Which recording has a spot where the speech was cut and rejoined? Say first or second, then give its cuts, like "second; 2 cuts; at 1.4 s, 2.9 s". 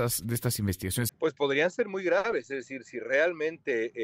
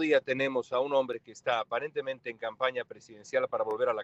first; 1 cut; at 1.1 s